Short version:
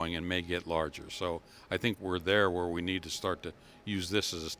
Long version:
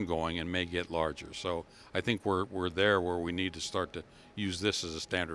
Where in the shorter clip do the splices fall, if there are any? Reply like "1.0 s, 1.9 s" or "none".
2.0 s